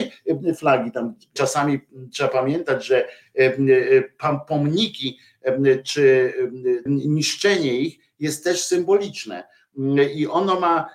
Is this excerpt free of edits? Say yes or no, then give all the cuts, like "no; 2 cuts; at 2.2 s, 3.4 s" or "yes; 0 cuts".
no; 2 cuts; at 1.4 s, 6.9 s